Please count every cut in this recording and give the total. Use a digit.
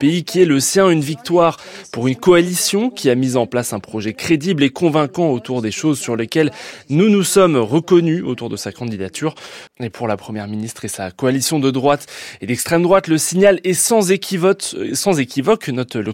1